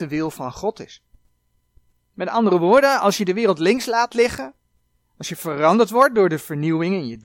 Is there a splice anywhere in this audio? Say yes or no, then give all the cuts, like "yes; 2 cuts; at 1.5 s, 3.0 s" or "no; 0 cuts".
no; 0 cuts